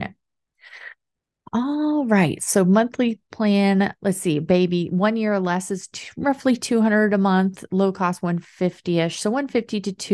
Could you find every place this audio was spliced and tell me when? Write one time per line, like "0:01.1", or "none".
0:02.4
0:04.0